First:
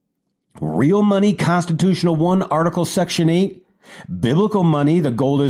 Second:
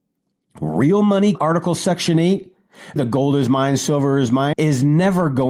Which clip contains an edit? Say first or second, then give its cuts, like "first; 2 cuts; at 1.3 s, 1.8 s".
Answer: second; 3 cuts; at 1.3 s, 3.0 s, 4.5 s